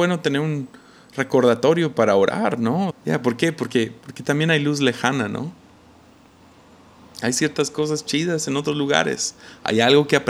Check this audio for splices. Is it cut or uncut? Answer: cut